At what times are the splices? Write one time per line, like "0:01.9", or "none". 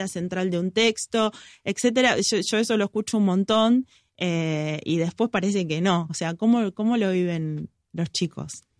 none